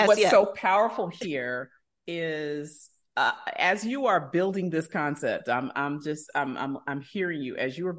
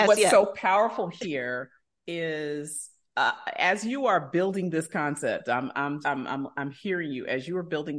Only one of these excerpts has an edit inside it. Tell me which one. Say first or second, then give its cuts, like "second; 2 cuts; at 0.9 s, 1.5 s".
second; 1 cut; at 6.0 s